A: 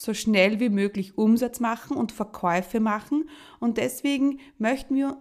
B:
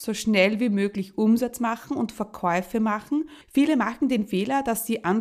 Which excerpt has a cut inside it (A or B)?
B